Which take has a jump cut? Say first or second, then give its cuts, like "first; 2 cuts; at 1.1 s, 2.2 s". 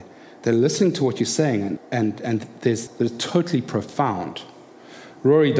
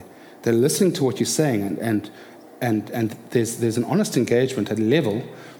first; 2 cuts; at 1.8 s, 2.9 s